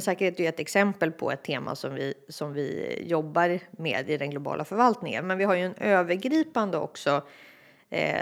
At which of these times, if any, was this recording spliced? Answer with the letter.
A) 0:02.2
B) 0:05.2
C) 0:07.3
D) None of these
B